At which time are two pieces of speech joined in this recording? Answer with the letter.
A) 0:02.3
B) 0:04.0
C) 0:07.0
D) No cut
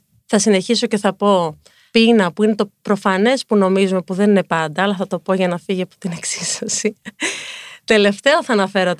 D